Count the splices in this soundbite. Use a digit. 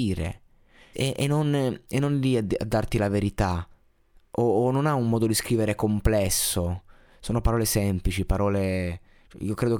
1